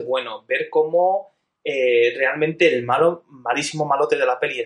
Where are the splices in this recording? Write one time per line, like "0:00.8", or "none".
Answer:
none

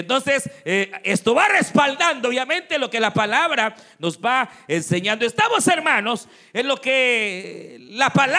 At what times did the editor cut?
none

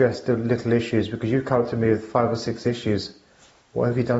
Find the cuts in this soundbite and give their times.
none

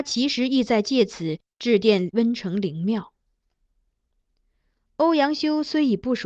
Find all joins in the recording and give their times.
none

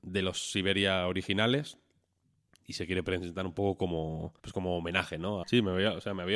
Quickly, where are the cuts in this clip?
0:04.4
0:05.4

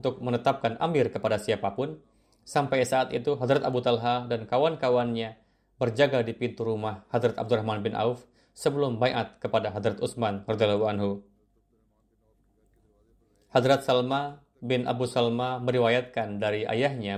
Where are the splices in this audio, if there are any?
none

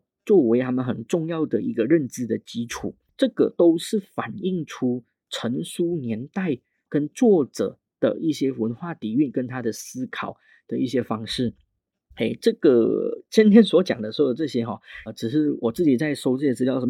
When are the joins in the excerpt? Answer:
0:15.1

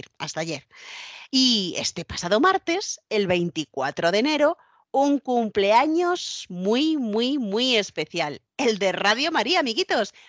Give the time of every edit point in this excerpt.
none

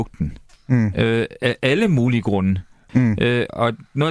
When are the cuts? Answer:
0:02.9

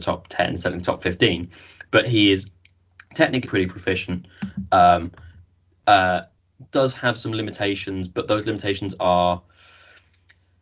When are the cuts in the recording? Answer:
0:03.4
0:06.7

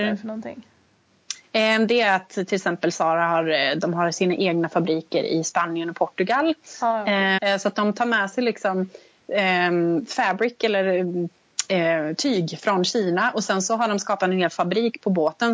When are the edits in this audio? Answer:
0:07.4

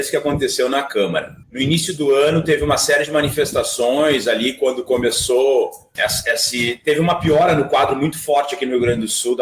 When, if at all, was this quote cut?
0:01.4
0:05.9

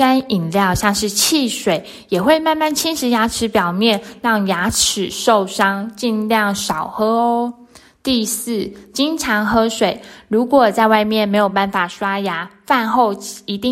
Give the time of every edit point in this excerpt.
none

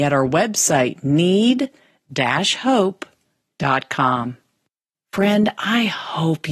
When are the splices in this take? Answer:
0:04.9

